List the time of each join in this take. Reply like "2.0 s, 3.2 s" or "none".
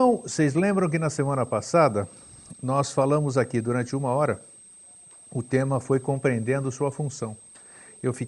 none

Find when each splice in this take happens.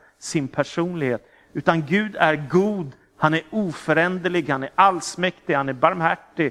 4.5 s

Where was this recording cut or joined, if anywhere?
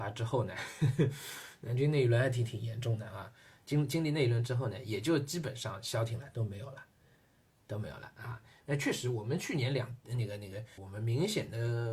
8.6 s, 10.8 s

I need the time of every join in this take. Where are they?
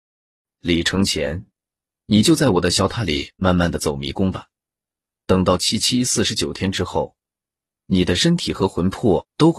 none

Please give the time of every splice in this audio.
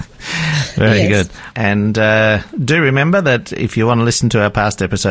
1.5 s

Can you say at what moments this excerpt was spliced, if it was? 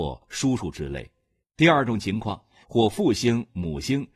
1.4 s, 2.6 s

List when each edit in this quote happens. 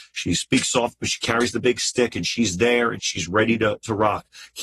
3.0 s

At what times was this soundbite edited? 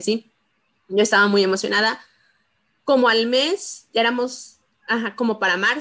none

